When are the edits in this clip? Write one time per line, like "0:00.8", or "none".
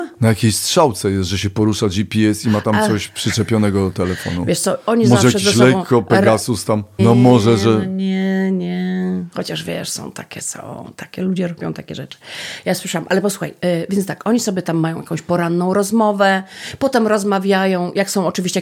0:07.0

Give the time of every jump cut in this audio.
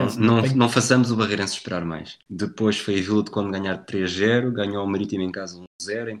0:02.3

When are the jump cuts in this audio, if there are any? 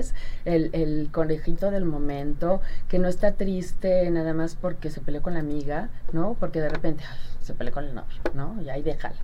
none

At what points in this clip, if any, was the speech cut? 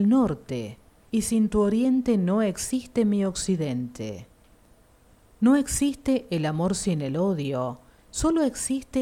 0:01.1

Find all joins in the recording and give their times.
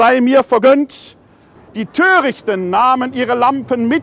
0:01.6

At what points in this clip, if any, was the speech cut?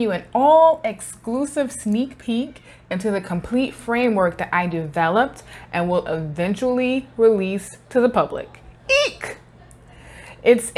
none

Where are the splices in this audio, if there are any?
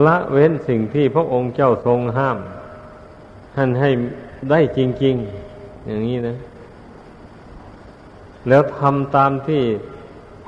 0:03.5

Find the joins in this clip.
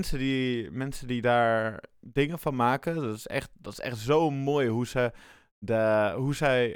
none

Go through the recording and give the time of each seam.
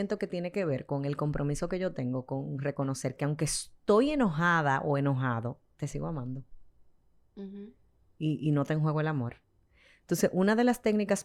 none

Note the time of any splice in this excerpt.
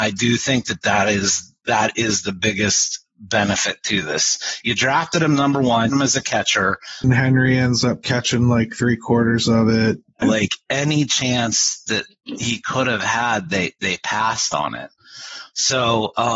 0:05.9
0:07.0
0:10.2

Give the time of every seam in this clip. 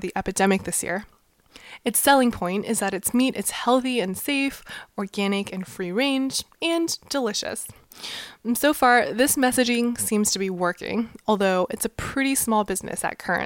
none

